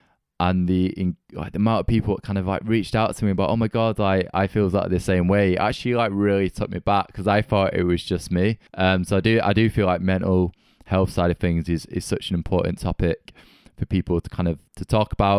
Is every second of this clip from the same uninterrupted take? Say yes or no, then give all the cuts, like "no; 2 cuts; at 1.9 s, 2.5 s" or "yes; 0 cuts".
no; 1 cut; at 8.7 s